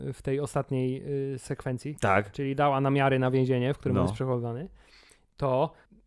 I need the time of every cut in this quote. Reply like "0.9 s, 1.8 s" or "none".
none